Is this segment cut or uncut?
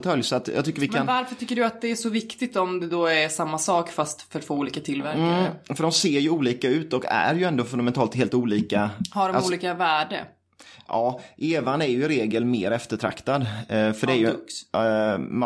uncut